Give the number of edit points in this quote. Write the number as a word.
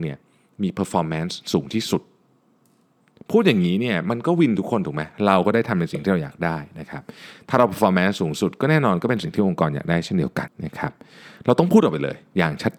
one